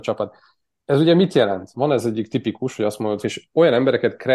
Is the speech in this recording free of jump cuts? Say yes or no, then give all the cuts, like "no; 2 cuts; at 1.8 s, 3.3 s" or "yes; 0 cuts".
no; 2 cuts; at 1.7 s, 3.2 s